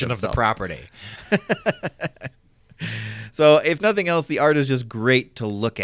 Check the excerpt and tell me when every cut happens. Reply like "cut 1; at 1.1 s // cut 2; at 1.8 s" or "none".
none